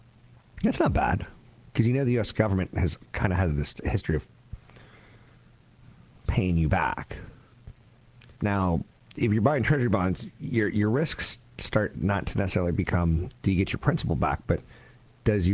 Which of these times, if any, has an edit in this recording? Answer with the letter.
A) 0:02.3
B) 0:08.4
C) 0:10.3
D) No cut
B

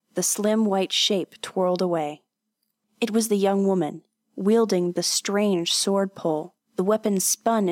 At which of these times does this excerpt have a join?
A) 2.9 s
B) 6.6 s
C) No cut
B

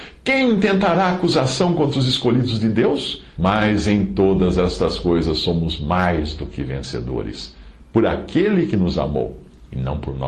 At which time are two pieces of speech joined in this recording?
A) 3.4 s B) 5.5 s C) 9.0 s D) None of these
A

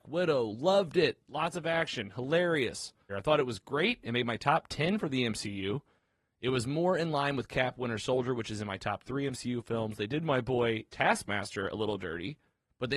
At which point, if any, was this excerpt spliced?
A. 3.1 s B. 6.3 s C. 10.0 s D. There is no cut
A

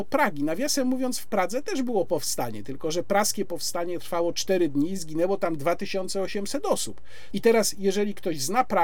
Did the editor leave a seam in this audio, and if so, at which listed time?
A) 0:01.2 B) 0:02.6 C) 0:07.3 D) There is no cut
C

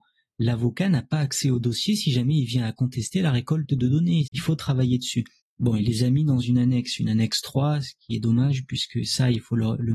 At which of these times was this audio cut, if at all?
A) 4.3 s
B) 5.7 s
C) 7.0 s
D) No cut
A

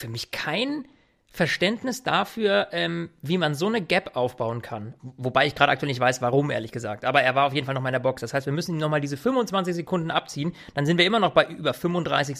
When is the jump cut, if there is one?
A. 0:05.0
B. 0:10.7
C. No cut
A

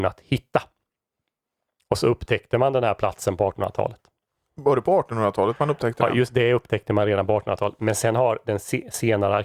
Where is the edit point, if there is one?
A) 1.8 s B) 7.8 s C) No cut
A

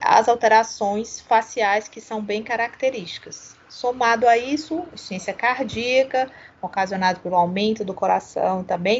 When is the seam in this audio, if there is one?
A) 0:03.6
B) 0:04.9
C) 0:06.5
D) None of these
D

